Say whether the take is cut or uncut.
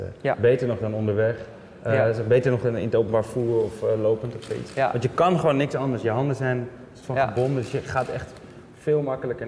uncut